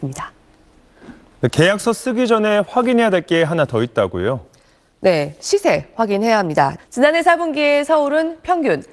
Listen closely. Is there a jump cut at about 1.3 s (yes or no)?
no